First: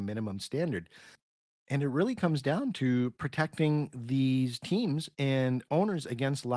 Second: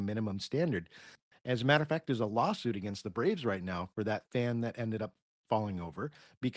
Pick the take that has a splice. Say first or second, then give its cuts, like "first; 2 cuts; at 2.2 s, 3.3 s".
second; 1 cut; at 1.3 s